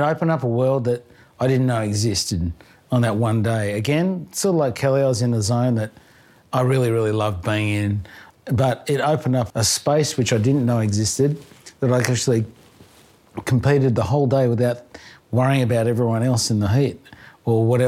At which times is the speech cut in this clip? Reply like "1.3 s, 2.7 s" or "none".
8.3 s, 9.5 s